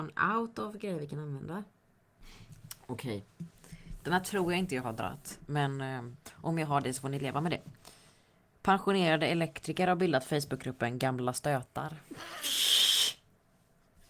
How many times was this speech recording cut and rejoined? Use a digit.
0